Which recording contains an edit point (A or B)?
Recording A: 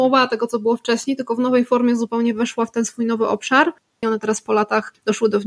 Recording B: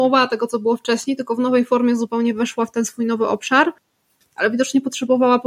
A